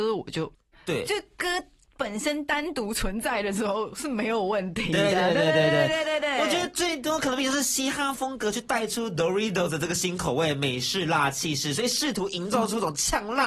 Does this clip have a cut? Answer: yes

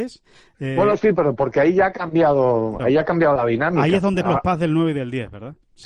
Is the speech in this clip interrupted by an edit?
yes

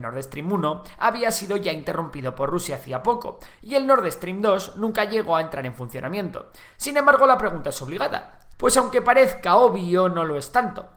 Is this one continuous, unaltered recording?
no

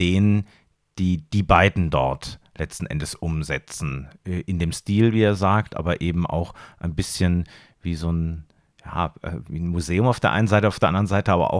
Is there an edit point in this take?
no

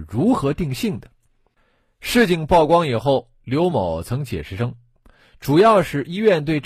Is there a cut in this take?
yes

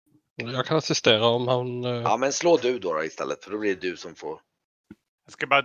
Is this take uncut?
yes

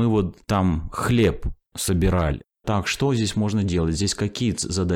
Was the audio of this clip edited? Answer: yes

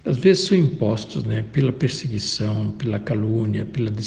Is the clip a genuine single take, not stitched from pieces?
yes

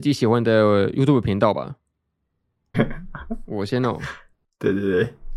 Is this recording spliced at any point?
yes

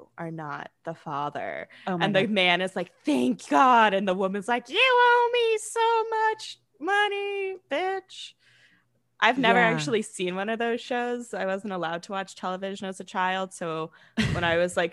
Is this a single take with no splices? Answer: yes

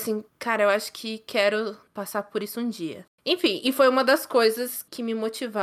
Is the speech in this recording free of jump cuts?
yes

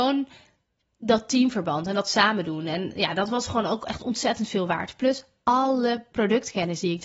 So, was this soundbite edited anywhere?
no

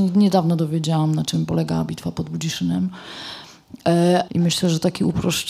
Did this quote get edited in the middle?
yes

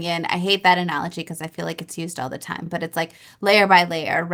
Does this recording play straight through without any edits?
yes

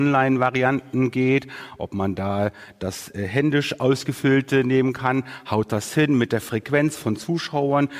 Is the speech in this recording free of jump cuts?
yes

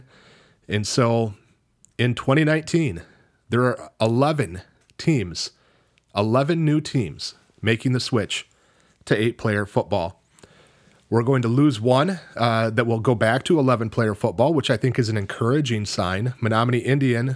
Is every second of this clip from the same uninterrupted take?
yes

